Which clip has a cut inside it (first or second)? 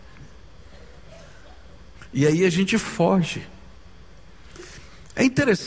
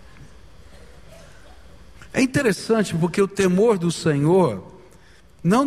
second